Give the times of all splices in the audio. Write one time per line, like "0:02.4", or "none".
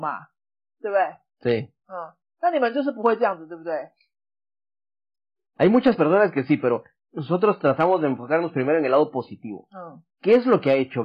none